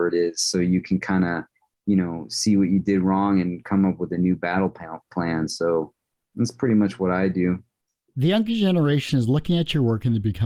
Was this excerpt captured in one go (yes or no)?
yes